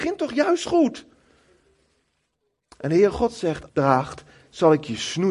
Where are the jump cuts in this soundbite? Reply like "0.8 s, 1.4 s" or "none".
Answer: 3.7 s